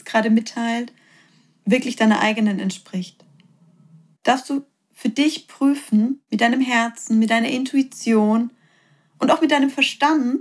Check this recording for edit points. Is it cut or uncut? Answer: cut